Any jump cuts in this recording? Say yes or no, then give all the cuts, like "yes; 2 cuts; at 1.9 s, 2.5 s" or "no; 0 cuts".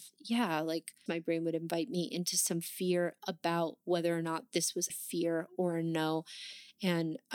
yes; 2 cuts; at 1.1 s, 4.9 s